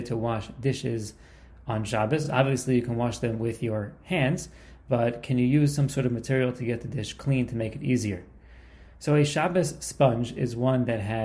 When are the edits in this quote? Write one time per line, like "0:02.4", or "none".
none